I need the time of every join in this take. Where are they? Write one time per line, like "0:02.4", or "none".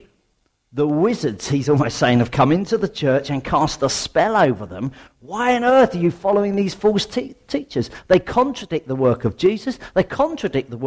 none